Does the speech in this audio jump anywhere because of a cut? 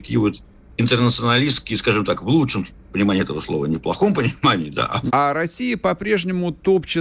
yes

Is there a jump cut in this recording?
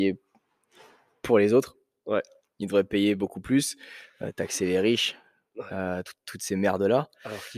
no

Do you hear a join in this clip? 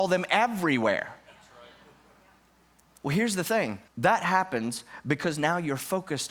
yes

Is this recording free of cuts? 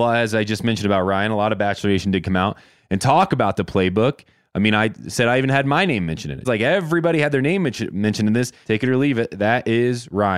no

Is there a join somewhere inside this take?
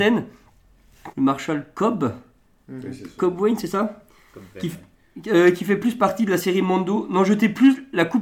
yes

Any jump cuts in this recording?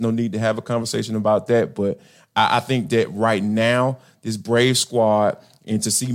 no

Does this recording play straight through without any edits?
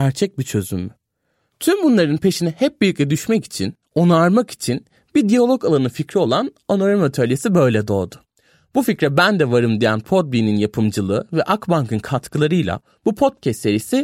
no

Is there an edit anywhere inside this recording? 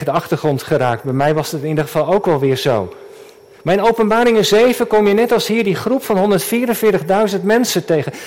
no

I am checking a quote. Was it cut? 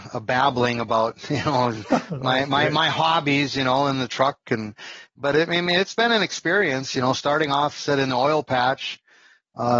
no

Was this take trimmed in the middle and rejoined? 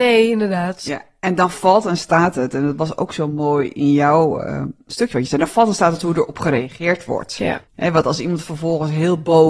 yes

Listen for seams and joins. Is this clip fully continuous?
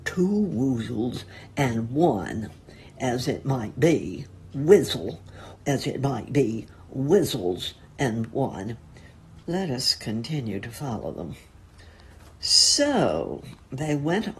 no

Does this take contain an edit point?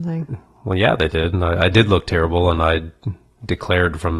no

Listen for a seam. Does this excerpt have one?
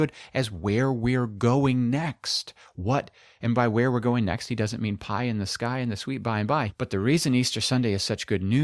yes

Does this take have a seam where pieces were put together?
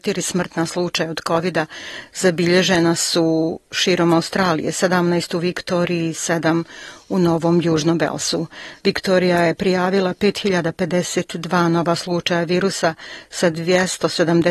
no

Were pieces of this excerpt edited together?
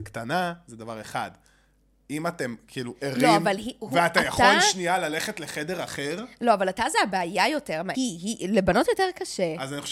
yes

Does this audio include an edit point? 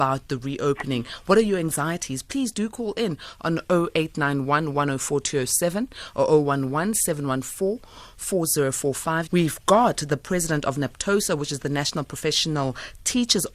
yes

